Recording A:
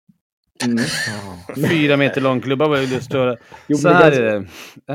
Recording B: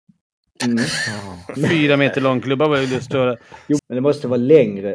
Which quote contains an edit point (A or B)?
B